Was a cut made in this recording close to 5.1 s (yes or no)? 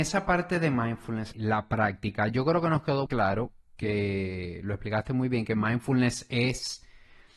no